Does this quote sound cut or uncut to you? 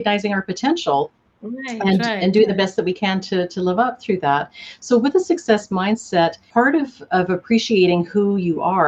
uncut